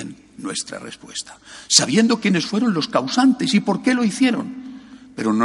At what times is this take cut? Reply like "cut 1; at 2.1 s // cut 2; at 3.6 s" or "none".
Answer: none